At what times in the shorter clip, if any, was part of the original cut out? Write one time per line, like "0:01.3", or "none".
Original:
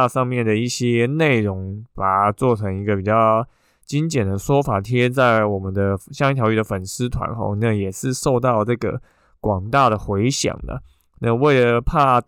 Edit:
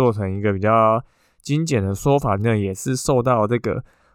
0:02.4